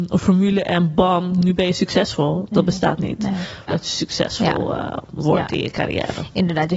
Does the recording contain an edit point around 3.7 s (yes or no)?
yes